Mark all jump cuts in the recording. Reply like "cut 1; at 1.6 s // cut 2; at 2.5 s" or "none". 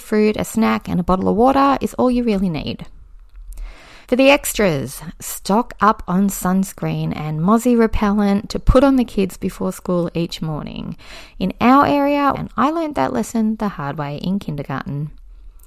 cut 1; at 4.0 s // cut 2; at 12.3 s